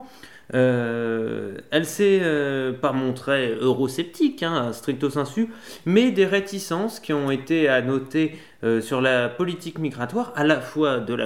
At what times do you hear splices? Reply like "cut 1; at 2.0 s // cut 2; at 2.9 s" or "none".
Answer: none